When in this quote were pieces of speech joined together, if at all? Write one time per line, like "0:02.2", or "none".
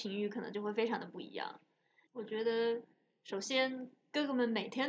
0:02.1